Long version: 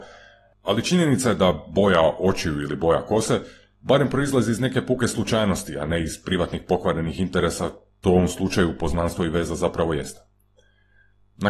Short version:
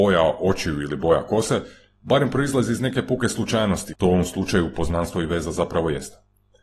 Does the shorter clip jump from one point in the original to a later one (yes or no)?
yes